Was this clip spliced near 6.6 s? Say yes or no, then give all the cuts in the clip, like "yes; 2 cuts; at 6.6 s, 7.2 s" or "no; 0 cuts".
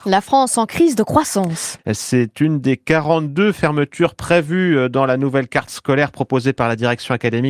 no; 1 cut; at 1.8 s